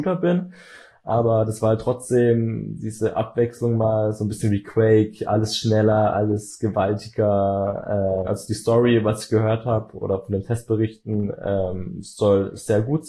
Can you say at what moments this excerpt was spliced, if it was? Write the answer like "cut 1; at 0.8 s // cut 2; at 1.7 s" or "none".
cut 1; at 8.3 s